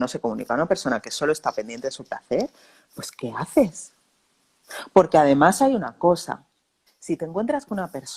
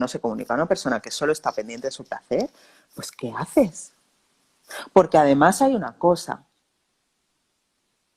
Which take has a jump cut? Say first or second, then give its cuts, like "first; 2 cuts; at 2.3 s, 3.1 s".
first; 1 cut; at 6.9 s